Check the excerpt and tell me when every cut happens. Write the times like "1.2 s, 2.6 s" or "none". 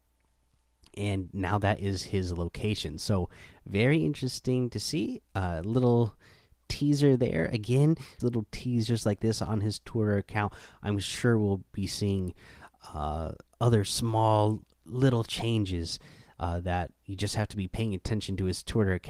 8.2 s, 14.7 s